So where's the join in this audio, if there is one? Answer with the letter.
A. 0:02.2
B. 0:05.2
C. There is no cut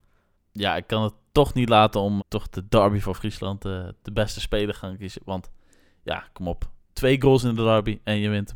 A